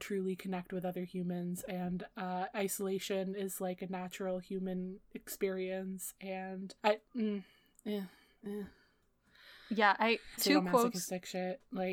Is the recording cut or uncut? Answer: cut